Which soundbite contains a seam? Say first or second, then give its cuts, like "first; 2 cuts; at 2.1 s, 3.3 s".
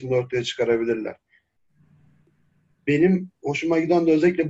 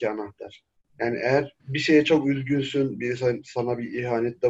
second; 1 cut; at 1.6 s